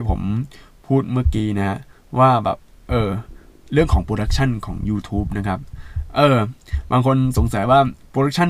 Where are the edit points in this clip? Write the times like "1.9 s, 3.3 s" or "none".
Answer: none